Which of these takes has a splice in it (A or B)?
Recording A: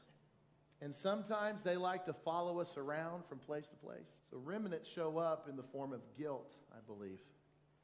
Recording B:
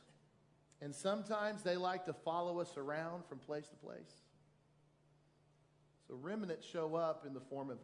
A